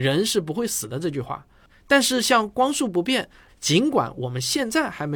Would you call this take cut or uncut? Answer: cut